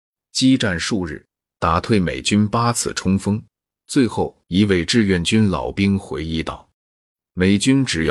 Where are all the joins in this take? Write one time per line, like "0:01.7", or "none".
0:04.4
0:06.7